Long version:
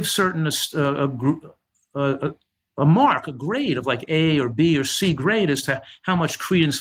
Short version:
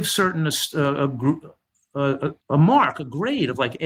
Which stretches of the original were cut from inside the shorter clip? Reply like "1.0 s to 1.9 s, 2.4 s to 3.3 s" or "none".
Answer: 2.4 s to 2.7 s

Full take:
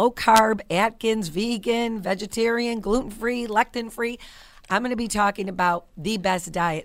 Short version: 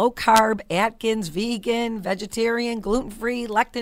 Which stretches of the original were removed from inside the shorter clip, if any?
none

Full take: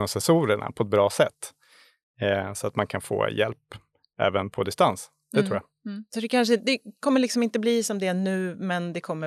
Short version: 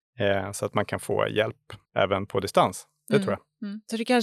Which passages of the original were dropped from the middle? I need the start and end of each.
3.9 s to 4.1 s

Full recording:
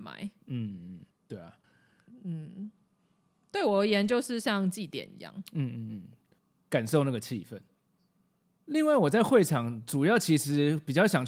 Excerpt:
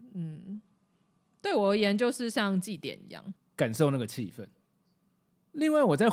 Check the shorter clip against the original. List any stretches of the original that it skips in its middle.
5.5 s to 6.5 s

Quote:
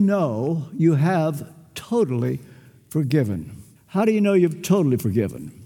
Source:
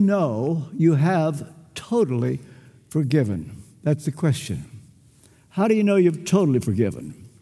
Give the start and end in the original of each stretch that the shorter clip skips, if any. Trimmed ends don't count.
3.8 s to 5.4 s

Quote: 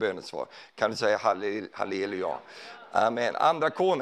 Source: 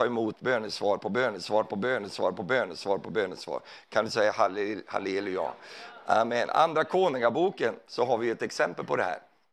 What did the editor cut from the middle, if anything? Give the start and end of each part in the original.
none

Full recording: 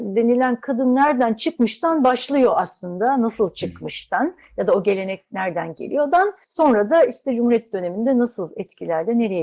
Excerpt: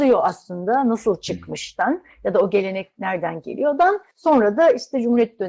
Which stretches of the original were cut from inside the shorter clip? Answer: none

